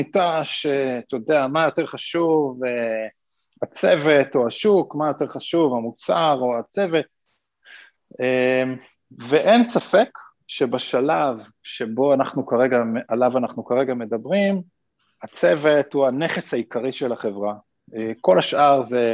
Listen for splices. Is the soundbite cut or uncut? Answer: uncut